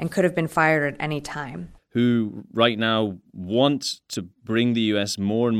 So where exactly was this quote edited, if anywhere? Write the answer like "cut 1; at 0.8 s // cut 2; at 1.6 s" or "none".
cut 1; at 1.8 s // cut 2; at 4.3 s